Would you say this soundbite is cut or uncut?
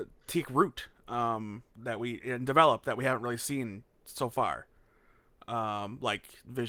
cut